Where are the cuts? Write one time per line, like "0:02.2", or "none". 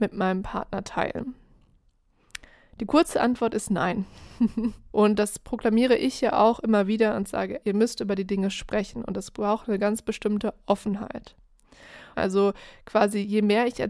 0:04.9
0:07.6
0:12.1